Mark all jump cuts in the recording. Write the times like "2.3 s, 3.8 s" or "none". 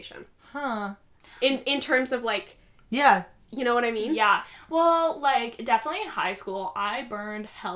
none